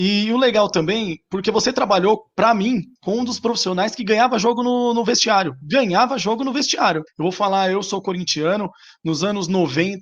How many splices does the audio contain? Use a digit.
2